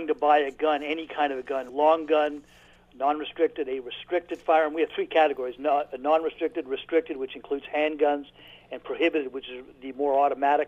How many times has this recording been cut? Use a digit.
1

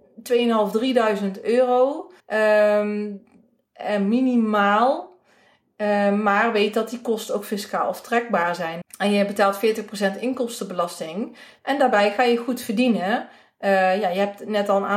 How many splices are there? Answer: 3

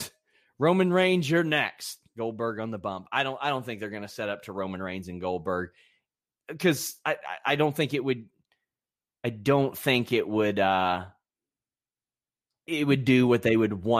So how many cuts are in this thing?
0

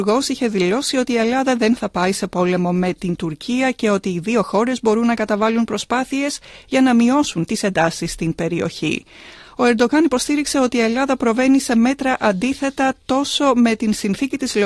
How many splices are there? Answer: 1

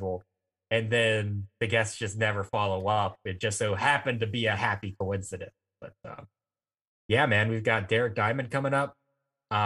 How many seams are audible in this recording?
0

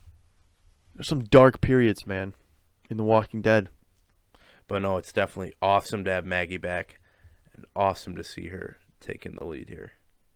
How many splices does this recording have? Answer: 0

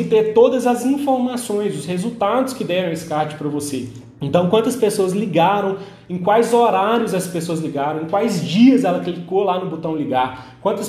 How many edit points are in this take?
1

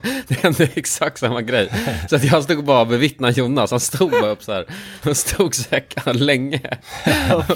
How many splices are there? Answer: 1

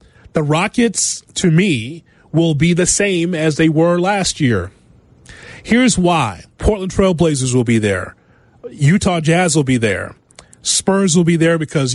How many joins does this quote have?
1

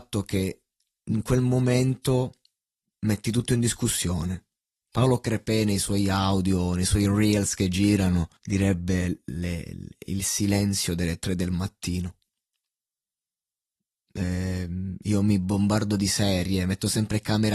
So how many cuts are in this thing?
1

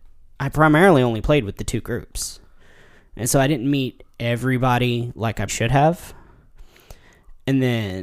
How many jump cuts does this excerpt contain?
1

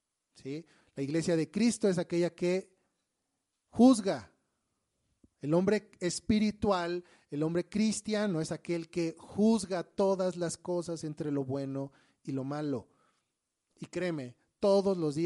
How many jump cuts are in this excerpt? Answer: 1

